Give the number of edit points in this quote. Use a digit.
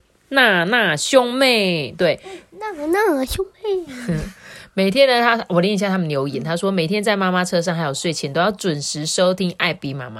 0